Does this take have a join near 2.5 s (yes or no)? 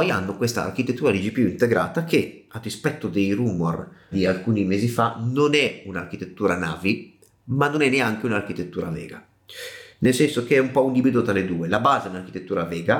no